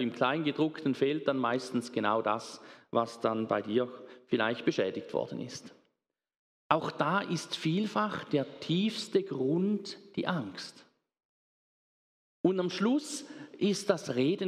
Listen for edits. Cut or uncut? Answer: uncut